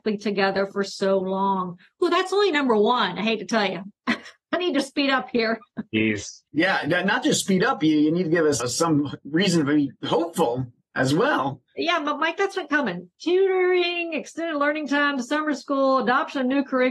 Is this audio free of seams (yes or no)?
no